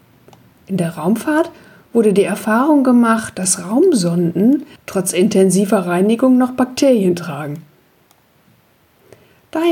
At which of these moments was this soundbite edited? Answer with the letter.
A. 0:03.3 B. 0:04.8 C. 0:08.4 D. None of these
B